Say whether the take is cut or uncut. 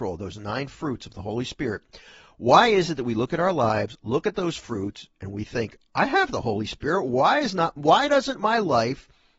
uncut